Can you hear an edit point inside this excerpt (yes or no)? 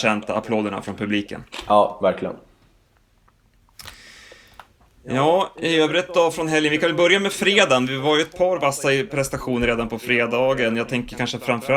no